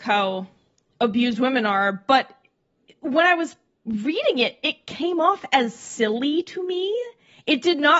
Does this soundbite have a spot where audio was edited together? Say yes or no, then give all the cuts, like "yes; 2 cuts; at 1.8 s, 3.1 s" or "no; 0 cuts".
no; 0 cuts